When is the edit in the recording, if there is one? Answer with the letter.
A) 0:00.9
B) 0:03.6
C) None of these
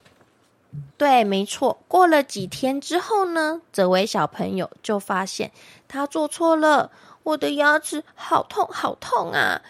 A